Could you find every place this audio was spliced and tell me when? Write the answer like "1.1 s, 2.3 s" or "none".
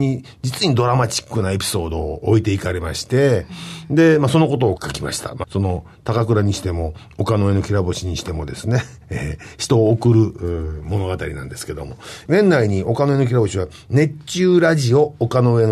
5.4 s